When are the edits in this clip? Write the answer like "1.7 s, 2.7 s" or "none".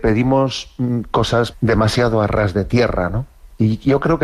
1.5 s

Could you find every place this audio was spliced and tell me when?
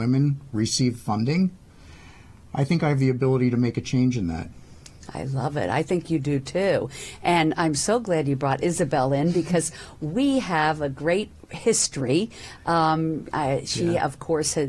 none

